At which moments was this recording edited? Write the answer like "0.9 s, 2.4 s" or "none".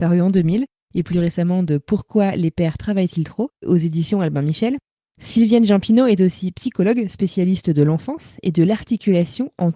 none